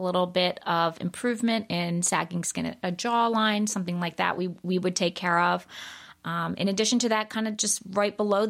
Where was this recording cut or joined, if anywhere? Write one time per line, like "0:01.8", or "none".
none

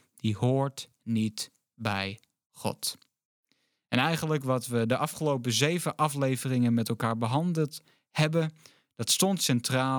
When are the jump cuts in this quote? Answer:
none

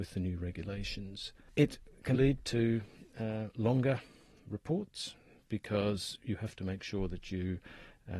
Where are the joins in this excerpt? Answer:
0:02.1

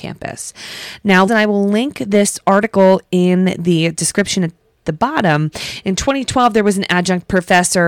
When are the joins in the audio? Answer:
0:01.3

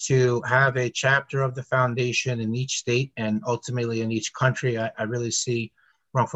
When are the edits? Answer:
none

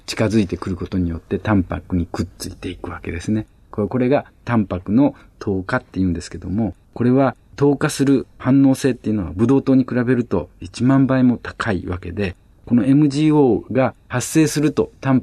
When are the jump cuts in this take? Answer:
0:03.7
0:06.8

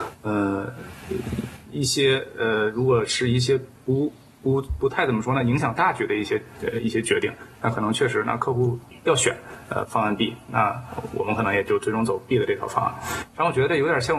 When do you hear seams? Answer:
none

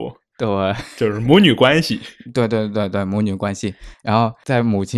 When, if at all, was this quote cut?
none

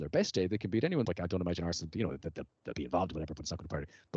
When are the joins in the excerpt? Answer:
0:01.1

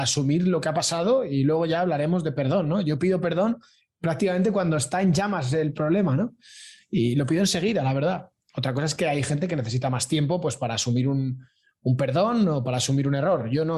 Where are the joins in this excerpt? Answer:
none

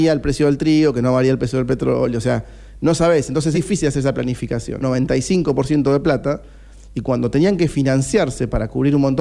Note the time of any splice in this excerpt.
0:03.5
0:04.8

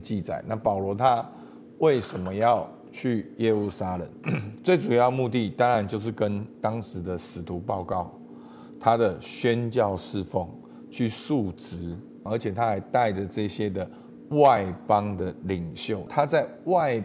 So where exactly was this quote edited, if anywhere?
0:04.2
0:12.3
0:16.1

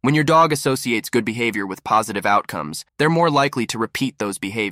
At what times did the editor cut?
0:02.9

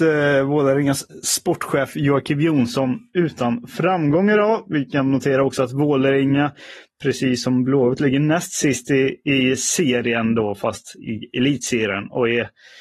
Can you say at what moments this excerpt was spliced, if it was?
none

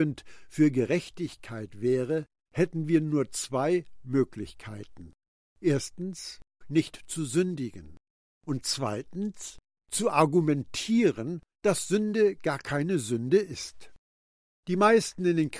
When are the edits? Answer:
0:06.6

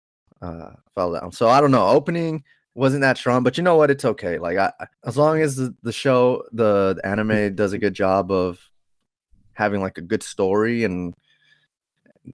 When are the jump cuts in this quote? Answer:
0:04.9

